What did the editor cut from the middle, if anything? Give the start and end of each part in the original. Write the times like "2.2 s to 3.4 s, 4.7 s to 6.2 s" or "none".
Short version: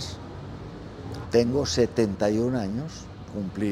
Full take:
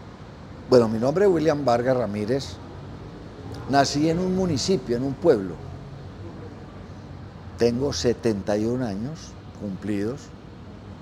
3.6 s to 7.5 s